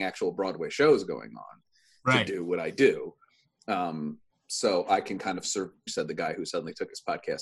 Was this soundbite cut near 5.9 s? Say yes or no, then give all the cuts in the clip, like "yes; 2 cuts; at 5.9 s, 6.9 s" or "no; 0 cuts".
yes; 1 cut; at 5.9 s